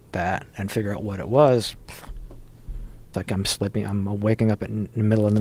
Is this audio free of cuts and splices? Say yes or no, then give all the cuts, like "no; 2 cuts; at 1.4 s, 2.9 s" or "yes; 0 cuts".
no; 1 cut; at 3.1 s